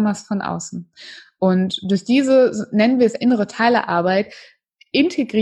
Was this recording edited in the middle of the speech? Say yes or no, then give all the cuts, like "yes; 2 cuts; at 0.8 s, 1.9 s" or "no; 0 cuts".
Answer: no; 0 cuts